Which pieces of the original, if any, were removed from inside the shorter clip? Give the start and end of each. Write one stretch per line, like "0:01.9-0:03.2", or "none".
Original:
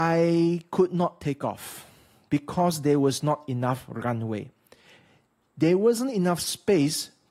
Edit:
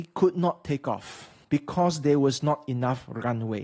0:02.0-0:02.2

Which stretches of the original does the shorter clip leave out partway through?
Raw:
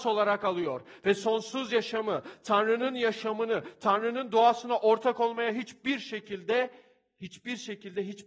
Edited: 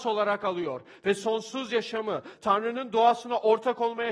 0:02.4-0:03.8

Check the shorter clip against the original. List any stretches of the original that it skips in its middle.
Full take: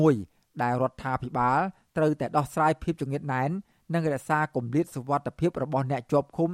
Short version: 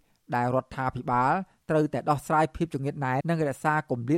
0:03.5-0:03.9

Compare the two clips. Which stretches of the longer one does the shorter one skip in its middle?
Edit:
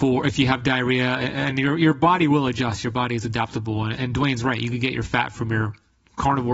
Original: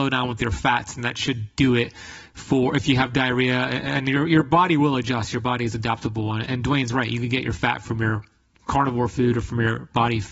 none

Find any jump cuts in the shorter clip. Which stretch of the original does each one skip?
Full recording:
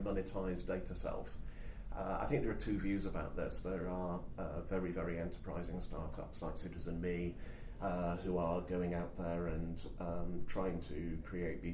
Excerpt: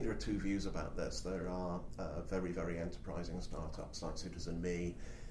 none

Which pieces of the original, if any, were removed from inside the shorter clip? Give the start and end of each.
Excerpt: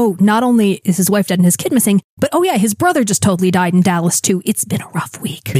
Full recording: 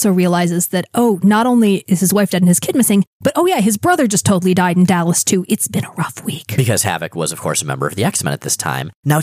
none

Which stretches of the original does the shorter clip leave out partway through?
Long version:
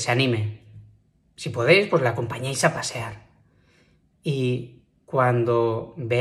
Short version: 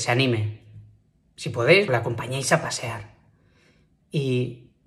0:01.9-0:02.0

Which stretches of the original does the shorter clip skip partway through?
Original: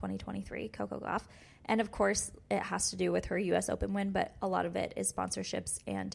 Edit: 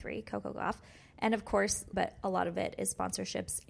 0:02.4-0:04.1

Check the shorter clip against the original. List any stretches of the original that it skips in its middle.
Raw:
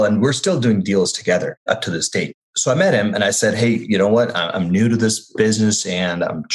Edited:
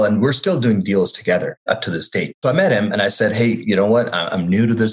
0:02.4-0:02.6

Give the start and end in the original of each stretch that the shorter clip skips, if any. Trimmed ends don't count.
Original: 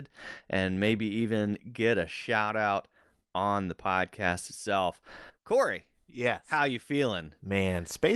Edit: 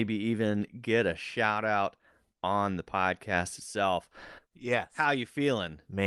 0:05.4-0:06.0

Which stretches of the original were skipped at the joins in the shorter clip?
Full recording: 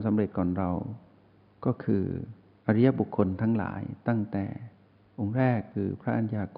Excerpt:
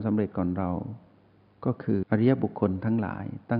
0:02.0-0:02.6

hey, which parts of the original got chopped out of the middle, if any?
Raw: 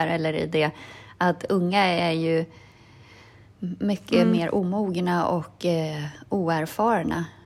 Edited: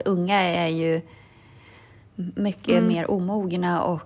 none

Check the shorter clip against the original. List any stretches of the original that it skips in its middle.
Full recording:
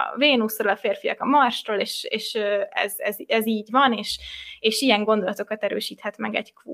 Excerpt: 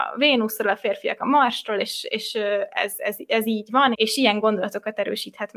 0:03.9-0:04.6

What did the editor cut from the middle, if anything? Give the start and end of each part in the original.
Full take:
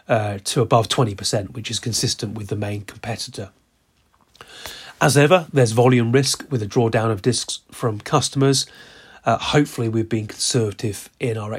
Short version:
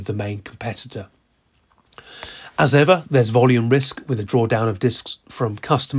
none

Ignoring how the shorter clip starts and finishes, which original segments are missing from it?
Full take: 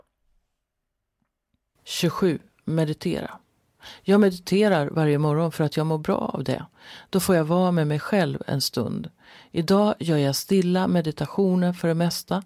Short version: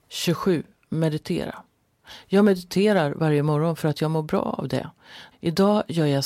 0:07.1-0:09.4

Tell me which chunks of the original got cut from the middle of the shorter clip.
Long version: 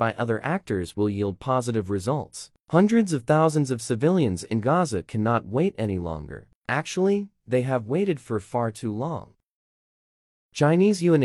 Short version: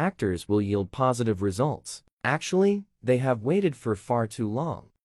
0:02.6-0:06.6

